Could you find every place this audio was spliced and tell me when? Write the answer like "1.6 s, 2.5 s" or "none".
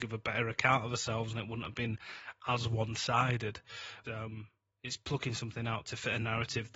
4.0 s, 5.8 s